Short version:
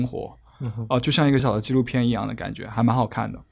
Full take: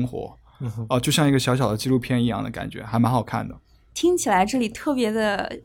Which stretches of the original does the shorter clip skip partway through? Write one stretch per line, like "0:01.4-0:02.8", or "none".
0:01.4-0:01.6